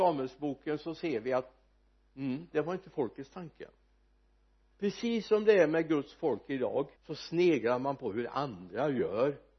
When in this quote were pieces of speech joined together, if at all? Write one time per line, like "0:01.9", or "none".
0:02.5
0:07.0